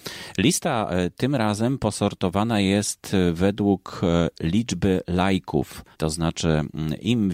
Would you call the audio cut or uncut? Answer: cut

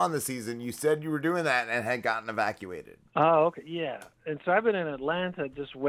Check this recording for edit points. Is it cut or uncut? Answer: cut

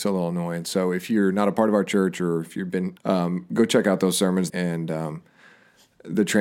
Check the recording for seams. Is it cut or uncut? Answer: cut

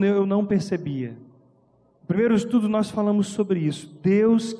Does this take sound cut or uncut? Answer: uncut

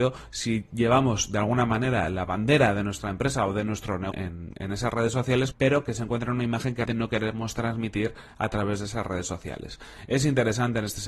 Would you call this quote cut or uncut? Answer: cut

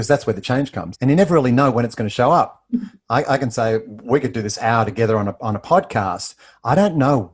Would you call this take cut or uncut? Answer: cut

